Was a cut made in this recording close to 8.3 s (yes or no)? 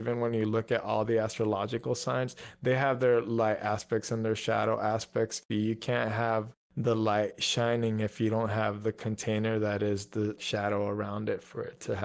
no